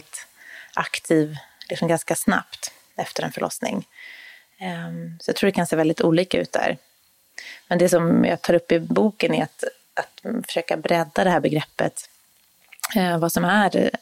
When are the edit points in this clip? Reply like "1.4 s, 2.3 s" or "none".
none